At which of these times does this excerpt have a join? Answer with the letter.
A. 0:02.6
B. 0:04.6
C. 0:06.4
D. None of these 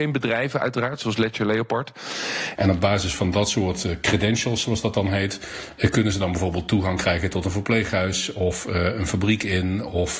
A